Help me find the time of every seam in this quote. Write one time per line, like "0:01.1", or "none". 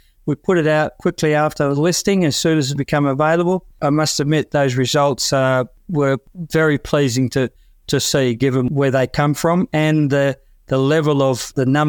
none